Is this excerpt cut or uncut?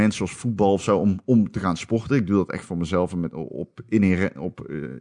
uncut